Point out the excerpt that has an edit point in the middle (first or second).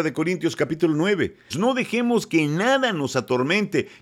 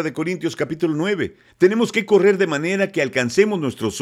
first